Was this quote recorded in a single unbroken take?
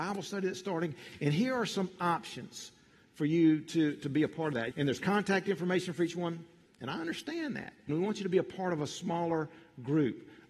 no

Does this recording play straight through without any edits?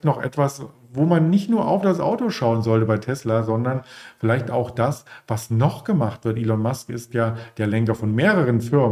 yes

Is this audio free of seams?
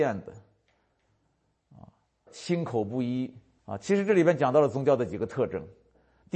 no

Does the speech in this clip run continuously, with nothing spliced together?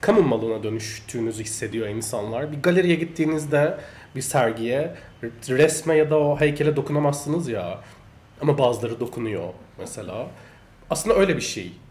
yes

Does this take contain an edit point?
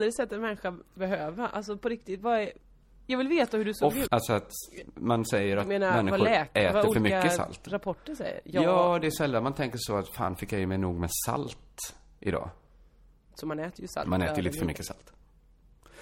yes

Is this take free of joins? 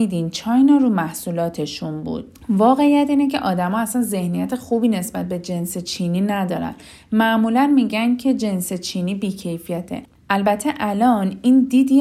yes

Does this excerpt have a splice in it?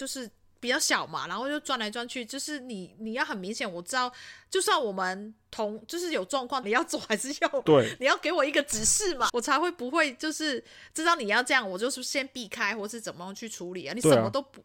yes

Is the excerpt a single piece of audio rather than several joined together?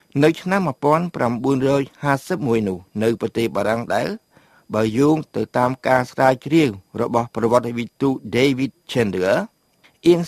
no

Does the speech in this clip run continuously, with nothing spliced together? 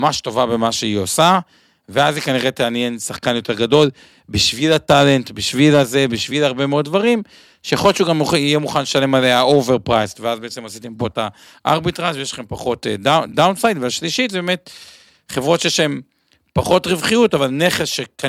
yes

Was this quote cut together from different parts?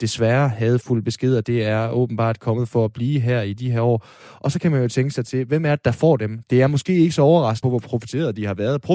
yes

